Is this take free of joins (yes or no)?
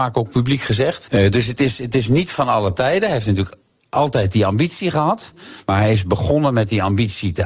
no